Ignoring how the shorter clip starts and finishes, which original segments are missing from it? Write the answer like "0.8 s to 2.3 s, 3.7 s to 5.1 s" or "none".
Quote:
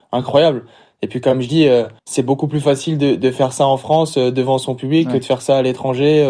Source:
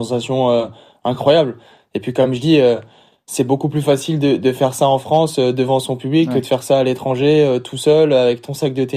2.9 s to 3.2 s